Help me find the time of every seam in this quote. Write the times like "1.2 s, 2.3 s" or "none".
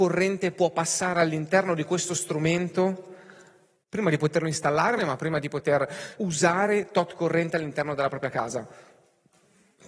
5.0 s, 6.2 s